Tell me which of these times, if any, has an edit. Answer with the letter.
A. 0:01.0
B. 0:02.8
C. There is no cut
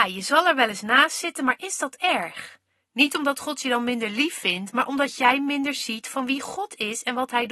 B